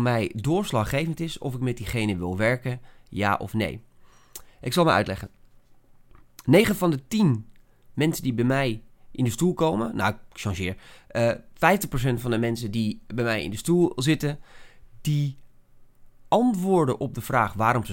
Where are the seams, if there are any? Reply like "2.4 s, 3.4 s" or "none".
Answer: none